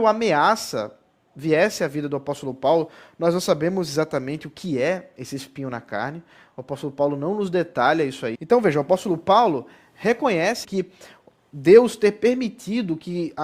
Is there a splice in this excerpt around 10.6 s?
yes; 2 cuts; at 8.3 s, 10.6 s

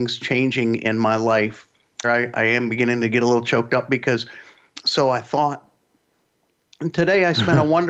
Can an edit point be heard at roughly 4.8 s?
yes; 2 cuts; at 2.0 s, 4.8 s

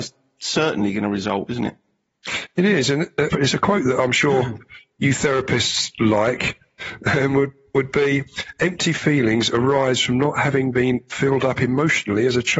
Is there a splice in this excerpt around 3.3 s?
yes; 1 cut; at 3.3 s

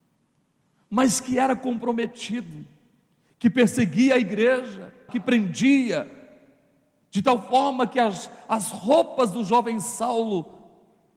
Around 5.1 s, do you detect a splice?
yes; 1 cut; at 5.1 s

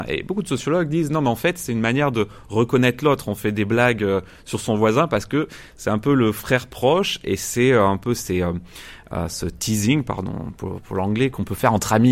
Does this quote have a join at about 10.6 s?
no; 0 cuts

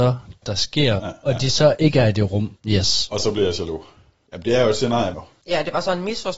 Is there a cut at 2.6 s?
yes; 3 cuts; at 1.0 s, 2.6 s, 5.1 s

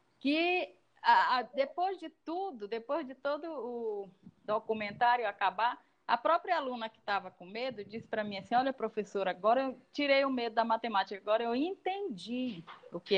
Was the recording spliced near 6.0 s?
no; 0 cuts

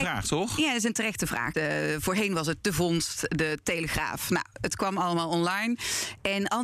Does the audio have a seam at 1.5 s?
yes; 1 cut; at 1.5 s

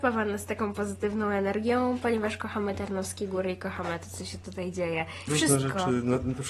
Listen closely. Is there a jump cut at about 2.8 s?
no; 1 cut; at 5.3 s

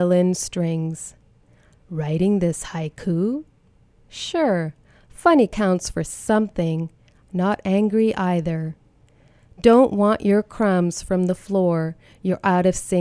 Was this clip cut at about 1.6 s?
no; 1 cut; at 7.2 s

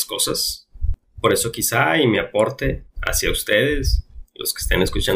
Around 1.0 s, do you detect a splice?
yes; 2 cuts; at 1.0 s, 2.9 s

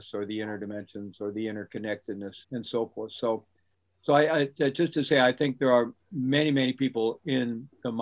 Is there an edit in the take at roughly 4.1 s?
no; 1 cut; at 2.4 s

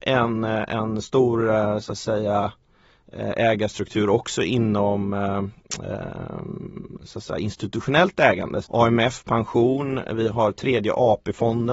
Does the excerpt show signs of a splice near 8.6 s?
yes; 1 cut; at 8.6 s

